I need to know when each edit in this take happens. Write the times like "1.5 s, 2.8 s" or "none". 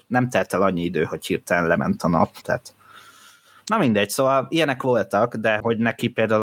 2.4 s